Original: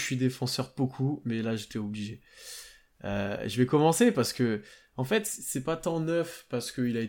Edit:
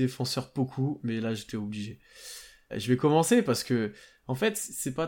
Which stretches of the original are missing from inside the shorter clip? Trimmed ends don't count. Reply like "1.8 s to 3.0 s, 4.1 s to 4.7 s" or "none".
2.9 s to 3.4 s